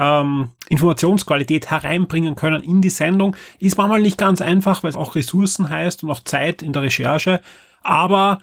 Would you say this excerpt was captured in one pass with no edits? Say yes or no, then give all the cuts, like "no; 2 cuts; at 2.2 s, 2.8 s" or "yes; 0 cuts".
no; 1 cut; at 4.9 s